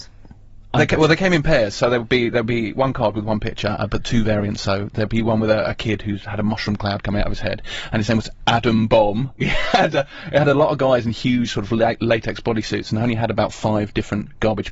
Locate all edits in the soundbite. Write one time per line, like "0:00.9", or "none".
0:09.4